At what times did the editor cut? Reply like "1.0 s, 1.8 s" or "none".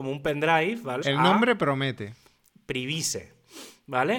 1.0 s